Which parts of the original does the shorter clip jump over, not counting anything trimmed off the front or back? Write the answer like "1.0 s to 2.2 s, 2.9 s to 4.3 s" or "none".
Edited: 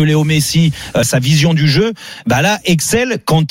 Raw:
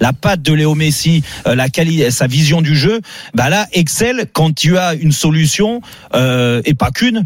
1.5 s to 2.1 s

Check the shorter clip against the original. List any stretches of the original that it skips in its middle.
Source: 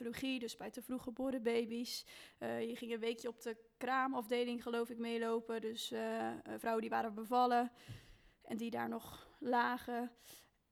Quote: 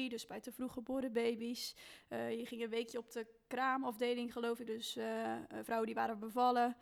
5.0 s to 5.6 s

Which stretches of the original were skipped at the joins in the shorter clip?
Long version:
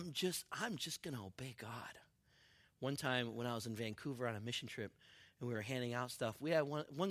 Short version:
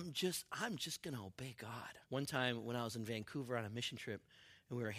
2.0 s to 2.7 s

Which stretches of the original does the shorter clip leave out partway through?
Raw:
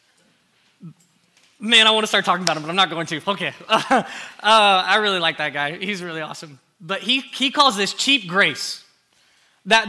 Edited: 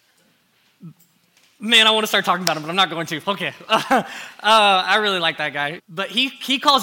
5.8 s to 6.7 s

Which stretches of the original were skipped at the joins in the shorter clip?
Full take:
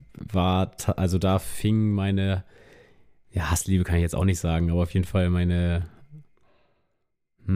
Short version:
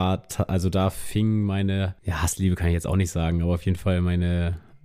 2.5 s to 3.3 s

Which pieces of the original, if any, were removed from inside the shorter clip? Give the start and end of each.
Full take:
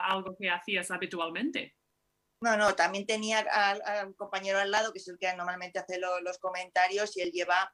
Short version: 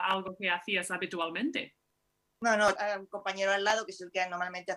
2.8 s to 3.8 s

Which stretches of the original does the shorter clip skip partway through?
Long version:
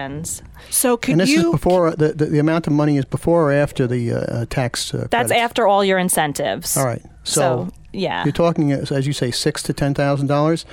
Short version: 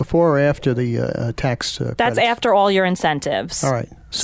none

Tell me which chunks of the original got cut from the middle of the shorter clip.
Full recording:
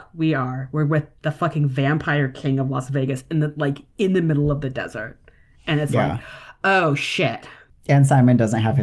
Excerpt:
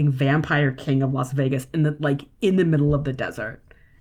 none

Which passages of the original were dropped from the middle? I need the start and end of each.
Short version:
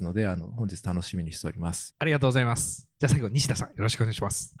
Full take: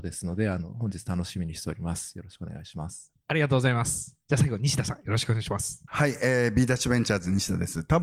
2.1 s to 3.2 s

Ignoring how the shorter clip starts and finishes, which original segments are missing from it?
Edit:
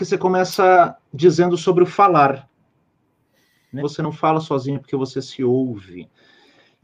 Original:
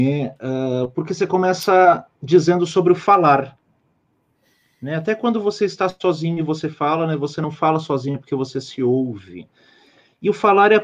4.9 s to 7.2 s

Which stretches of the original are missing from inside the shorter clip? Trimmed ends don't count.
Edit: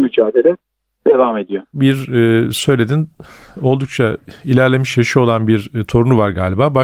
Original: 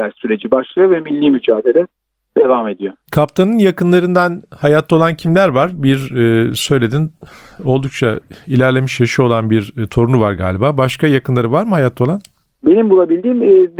3.0 s to 5.8 s

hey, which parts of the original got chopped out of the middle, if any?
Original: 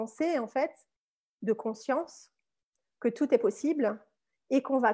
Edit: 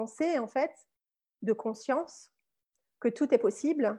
none

